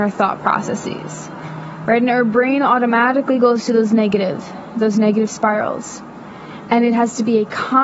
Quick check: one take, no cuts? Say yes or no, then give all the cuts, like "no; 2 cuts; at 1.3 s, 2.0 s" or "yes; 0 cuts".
yes; 0 cuts